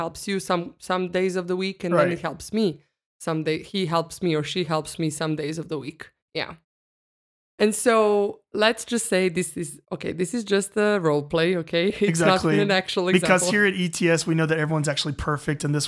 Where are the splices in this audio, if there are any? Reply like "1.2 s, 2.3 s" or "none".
none

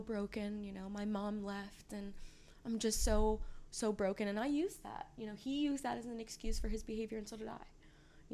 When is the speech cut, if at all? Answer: none

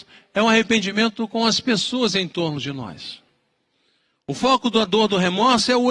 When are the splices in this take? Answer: none

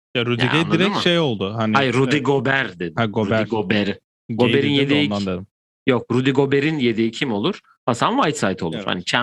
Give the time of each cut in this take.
none

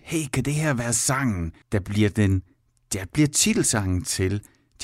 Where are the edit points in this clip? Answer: 1.6 s

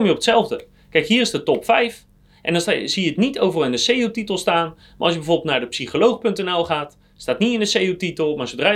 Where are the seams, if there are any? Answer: none

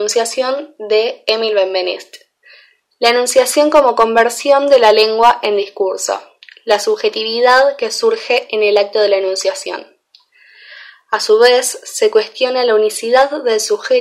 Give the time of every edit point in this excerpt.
none

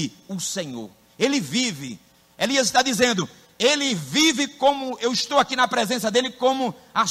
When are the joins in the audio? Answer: none

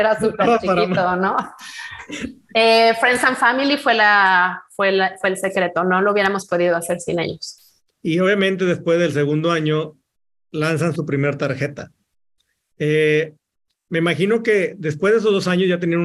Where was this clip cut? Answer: none

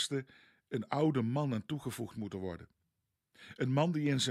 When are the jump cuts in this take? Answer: none

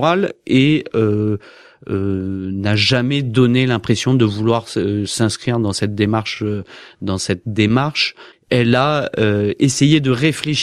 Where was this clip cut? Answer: none

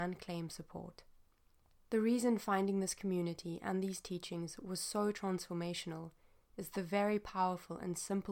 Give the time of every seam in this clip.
none

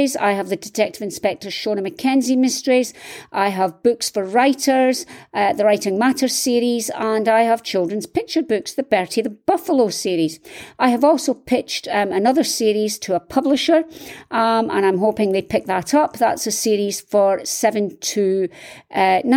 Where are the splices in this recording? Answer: none

